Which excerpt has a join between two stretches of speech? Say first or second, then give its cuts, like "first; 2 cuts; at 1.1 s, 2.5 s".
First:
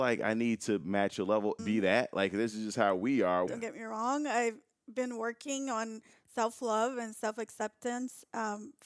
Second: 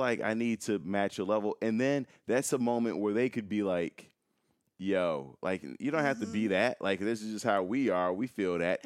first; 2 cuts; at 1.6 s, 3.5 s